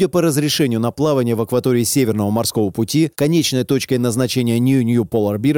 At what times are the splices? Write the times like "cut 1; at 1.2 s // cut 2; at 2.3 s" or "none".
cut 1; at 3.1 s